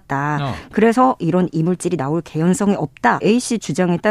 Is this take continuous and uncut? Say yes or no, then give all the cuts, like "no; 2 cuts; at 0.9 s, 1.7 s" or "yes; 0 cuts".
no; 1 cut; at 3.2 s